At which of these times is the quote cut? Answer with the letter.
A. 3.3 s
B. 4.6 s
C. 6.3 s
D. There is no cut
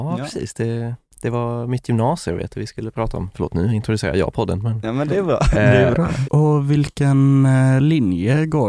C